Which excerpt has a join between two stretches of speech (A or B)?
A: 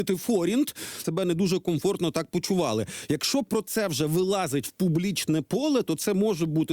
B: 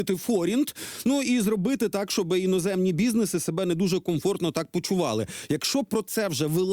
A